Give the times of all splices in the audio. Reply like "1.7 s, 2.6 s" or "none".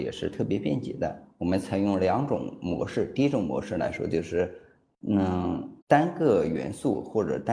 5.8 s